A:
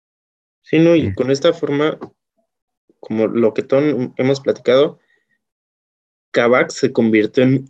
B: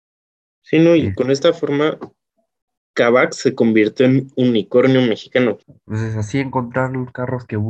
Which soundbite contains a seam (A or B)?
B